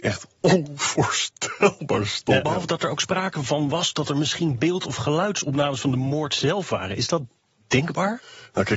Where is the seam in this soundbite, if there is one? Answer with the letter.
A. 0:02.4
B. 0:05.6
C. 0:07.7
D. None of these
A